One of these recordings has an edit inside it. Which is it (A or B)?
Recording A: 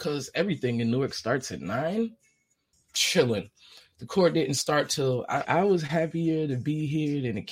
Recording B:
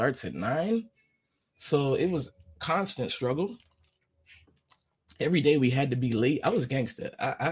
A